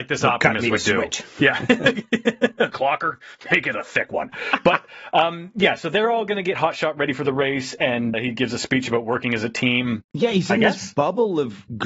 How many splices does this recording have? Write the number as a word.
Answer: two